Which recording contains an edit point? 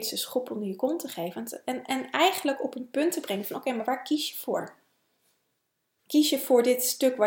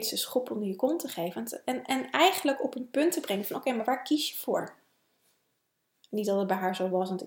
second; 1 cut; at 5.9 s

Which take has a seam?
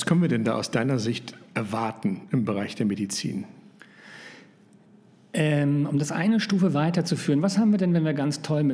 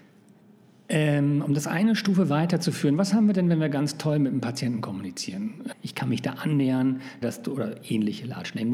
second; 2 cuts; at 5.7 s, 7.2 s

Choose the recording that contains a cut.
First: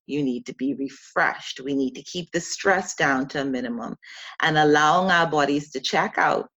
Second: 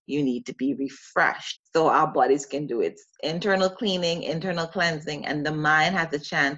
second; 1 cut; at 1.5 s

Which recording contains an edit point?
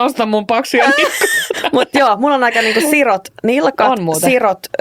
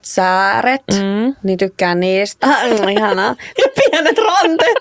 second; 2 cuts; at 2.4 s, 3.6 s

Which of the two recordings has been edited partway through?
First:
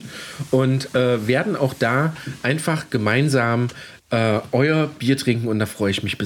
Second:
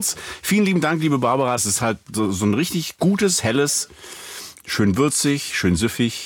second; 2 cuts; at 1.6 s, 4.5 s

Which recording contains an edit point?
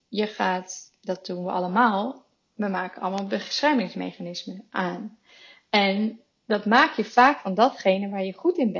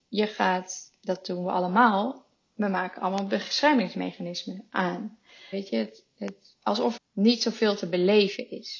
second; 2 cuts; at 5.5 s, 7.0 s

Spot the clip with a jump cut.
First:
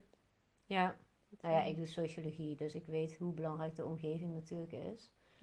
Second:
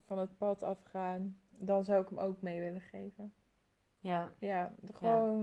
second; 1 cut; at 1.5 s

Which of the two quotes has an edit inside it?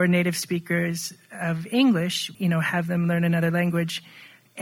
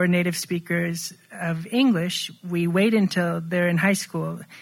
first; 1 cut; at 2.3 s

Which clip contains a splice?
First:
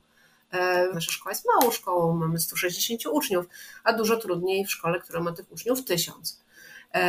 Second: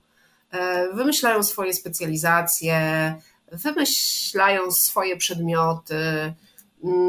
first; 1 cut; at 0.9 s

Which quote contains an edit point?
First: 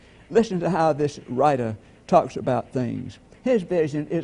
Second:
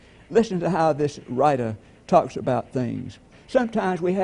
second; 1 cut; at 3.3 s

